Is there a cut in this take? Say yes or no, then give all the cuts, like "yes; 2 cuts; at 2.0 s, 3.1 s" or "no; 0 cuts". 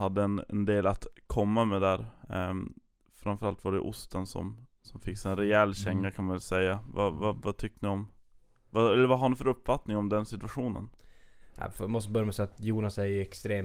no; 0 cuts